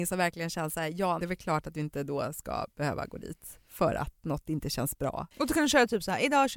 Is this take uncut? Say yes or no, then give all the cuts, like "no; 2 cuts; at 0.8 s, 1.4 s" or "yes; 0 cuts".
no; 2 cuts; at 1.2 s, 5.3 s